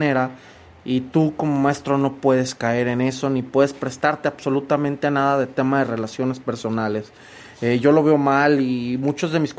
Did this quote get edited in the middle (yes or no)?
no